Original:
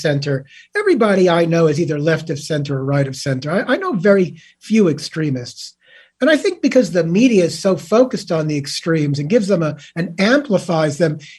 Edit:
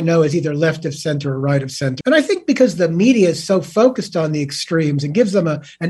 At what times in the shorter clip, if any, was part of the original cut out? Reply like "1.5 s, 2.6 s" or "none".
2.0 s